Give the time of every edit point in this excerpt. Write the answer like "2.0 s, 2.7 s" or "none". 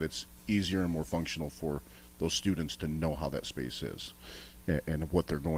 none